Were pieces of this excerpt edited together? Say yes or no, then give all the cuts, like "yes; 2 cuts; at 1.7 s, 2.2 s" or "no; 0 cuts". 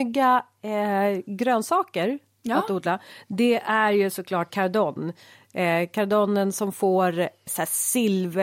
yes; 2 cuts; at 4.5 s, 7.5 s